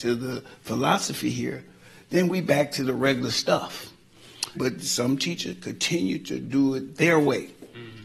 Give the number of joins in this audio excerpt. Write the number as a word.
one